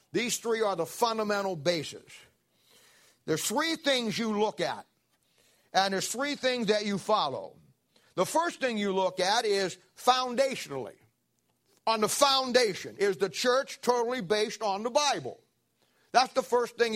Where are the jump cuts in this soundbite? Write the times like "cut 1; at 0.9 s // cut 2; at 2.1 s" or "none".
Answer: none